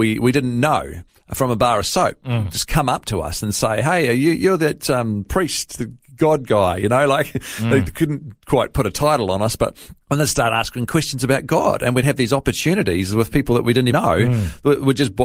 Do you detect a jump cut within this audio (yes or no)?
yes